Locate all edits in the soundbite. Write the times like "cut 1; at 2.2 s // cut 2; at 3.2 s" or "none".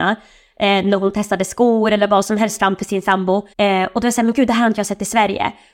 cut 1; at 3.5 s